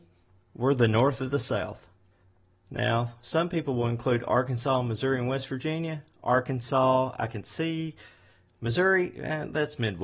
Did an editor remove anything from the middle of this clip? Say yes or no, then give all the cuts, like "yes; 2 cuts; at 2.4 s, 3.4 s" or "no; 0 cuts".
no; 0 cuts